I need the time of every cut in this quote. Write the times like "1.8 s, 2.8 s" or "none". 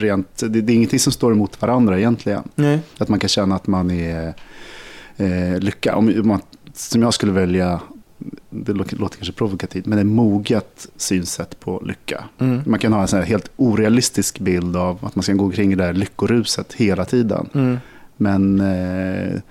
none